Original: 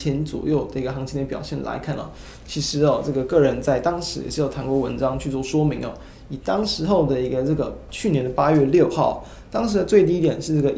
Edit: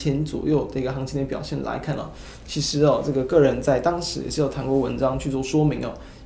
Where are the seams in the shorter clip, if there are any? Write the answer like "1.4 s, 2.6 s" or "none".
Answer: none